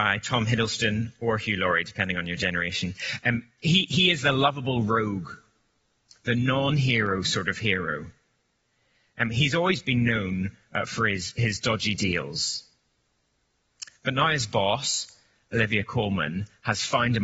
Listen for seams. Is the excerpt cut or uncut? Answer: uncut